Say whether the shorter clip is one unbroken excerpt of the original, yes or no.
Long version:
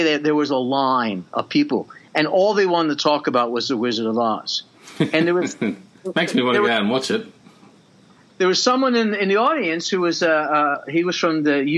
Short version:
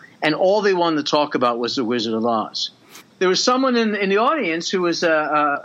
no